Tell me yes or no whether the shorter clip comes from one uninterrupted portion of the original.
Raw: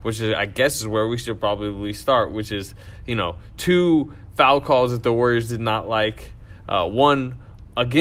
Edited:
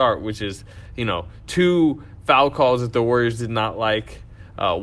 yes